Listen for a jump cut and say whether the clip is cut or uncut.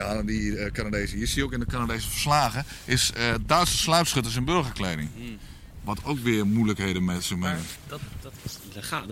uncut